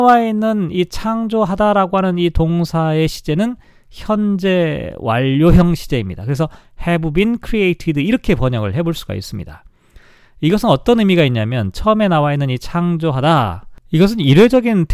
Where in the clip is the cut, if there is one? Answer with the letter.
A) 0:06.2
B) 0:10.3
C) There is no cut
C